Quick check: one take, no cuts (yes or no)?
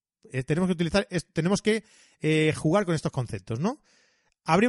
yes